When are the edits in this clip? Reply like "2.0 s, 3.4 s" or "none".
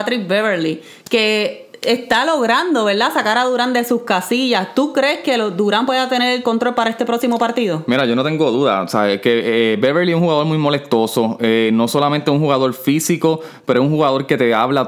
none